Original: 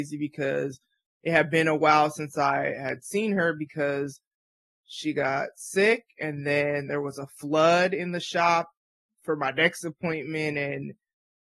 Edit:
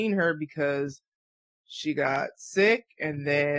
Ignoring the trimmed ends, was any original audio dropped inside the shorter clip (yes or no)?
no